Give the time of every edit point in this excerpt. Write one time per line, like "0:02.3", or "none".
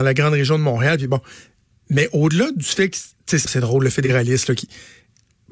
0:03.5